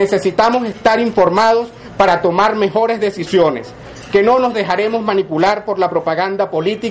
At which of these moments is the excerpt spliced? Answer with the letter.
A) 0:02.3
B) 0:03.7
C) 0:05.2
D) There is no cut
D